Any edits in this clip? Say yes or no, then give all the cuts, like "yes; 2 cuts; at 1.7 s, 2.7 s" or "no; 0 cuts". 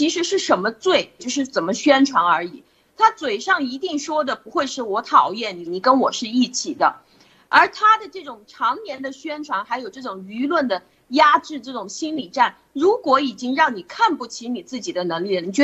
yes; 2 cuts; at 1.2 s, 5.7 s